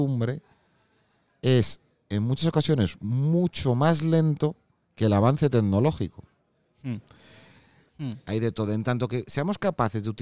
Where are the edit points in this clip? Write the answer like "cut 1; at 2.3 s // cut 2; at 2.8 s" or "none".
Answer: cut 1; at 7.9 s